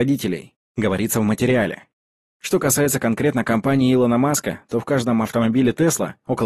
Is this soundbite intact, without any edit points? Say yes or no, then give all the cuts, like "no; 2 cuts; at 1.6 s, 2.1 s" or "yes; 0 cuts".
yes; 0 cuts